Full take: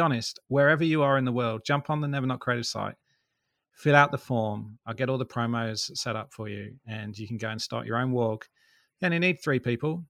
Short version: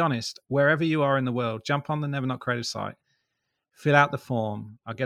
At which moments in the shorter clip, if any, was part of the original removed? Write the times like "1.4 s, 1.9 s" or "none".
none